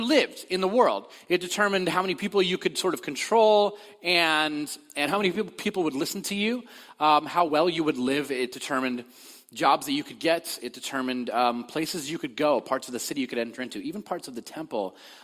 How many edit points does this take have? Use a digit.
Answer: 0